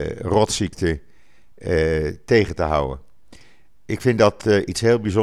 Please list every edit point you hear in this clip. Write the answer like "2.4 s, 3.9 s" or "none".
none